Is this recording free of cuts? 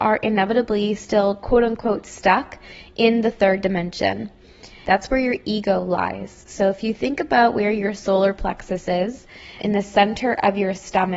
no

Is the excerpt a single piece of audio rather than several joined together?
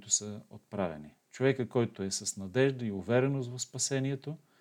yes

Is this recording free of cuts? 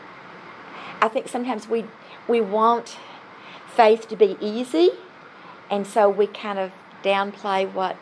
yes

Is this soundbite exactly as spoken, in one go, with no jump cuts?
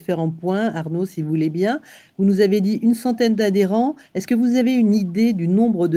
yes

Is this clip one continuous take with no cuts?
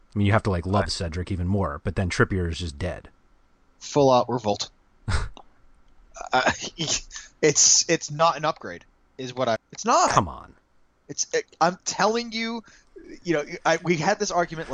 no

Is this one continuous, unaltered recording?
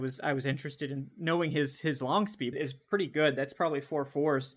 no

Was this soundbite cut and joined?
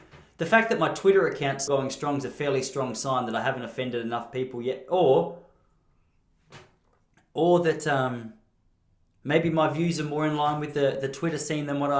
yes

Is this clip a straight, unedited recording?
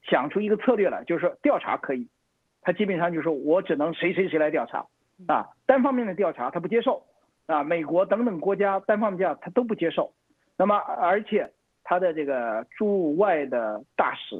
yes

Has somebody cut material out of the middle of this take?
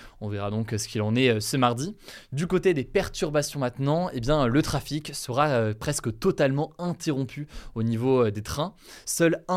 no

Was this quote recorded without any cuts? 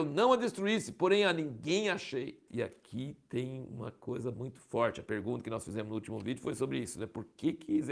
no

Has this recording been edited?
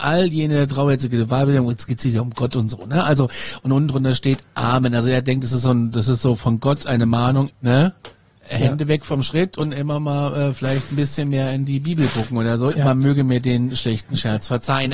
yes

